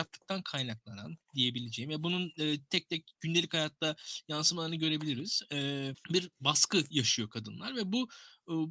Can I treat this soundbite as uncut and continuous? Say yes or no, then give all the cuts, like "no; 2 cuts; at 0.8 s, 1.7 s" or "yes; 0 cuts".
yes; 0 cuts